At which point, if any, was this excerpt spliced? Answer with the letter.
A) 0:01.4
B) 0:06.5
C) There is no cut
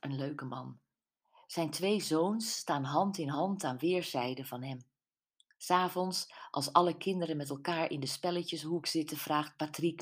C